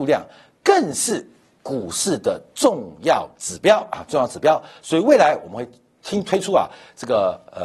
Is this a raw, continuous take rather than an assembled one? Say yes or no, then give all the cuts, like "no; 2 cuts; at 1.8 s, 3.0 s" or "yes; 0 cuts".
yes; 0 cuts